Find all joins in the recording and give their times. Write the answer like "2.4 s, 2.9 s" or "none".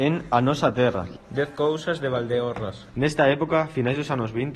1.2 s, 2.9 s